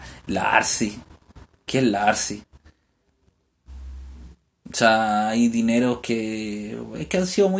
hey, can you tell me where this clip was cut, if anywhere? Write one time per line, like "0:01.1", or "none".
none